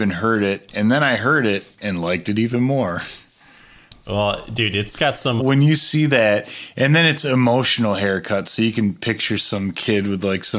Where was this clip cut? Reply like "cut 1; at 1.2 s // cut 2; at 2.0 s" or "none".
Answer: cut 1; at 4.0 s // cut 2; at 5.4 s